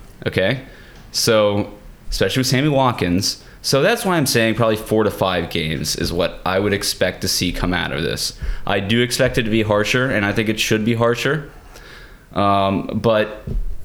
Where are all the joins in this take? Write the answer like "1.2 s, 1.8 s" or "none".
2.0 s